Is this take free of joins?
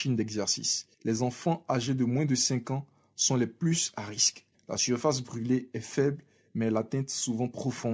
no; 2 cuts; at 0.9 s, 4.5 s

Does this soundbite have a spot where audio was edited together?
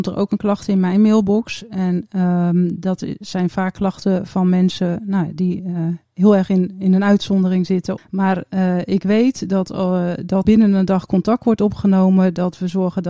yes; 2 cuts; at 8.0 s, 10.4 s

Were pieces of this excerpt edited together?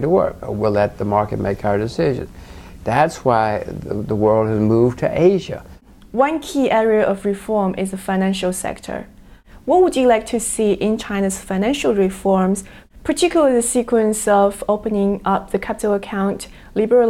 yes; 1 cut; at 2.8 s

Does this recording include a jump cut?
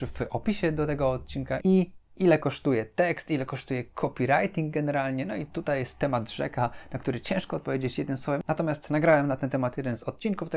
yes; 1 cut; at 1.6 s

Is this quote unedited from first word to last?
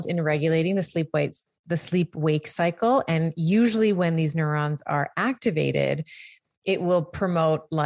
yes; 0 cuts

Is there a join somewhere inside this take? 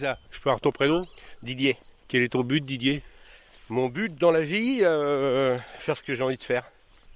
no; 0 cuts

